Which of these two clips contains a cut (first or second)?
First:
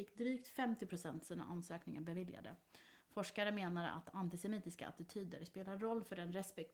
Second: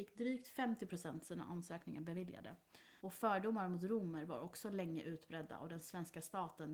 second